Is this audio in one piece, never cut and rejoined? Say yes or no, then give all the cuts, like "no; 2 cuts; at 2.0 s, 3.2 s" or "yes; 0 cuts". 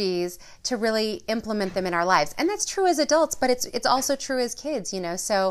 yes; 0 cuts